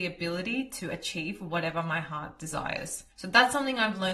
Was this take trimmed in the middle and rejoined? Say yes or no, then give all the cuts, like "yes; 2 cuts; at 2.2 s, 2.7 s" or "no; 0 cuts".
yes; 1 cut; at 3.1 s